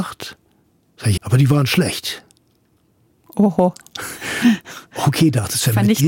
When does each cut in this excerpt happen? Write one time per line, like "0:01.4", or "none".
0:01.2